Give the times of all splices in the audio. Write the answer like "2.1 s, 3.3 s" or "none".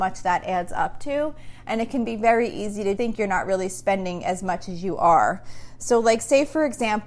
3.0 s